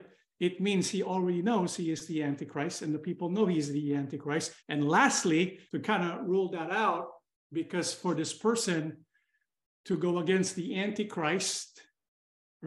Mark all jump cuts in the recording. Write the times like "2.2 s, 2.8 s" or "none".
4.6 s, 5.7 s